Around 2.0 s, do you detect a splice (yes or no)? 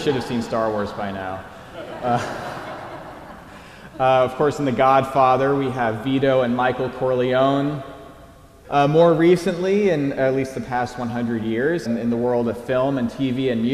no